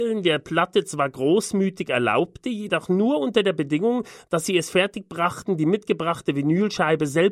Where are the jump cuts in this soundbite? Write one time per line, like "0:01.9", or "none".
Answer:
none